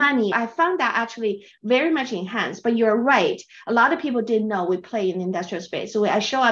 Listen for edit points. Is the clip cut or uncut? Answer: uncut